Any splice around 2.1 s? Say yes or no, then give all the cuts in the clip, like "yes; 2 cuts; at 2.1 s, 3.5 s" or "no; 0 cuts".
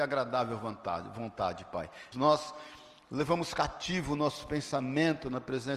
yes; 1 cut; at 2.1 s